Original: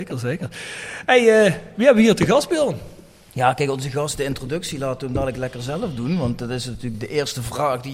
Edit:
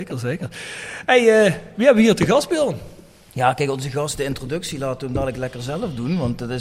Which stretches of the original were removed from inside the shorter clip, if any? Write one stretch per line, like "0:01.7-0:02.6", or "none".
none